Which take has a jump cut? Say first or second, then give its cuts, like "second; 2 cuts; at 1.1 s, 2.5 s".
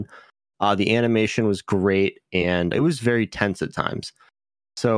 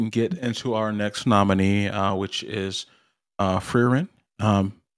first; 1 cut; at 2.7 s